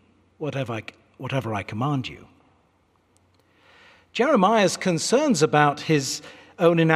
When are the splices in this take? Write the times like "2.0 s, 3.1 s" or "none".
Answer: none